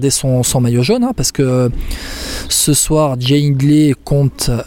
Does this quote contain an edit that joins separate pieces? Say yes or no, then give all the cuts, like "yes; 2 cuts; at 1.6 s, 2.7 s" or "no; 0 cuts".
no; 0 cuts